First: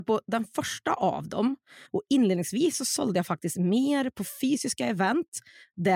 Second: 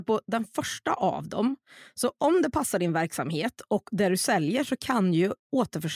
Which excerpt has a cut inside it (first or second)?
first